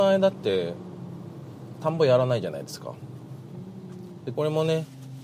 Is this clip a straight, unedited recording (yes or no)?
no